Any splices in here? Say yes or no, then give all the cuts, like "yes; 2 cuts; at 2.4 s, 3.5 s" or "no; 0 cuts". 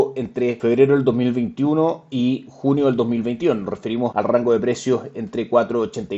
no; 0 cuts